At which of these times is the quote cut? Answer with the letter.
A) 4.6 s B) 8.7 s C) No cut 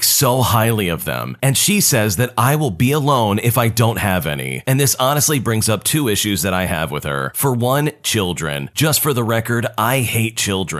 A